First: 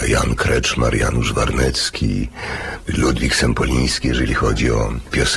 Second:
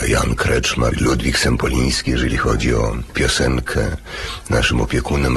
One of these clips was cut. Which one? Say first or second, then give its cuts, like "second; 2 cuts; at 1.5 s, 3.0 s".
second; 1 cut; at 0.9 s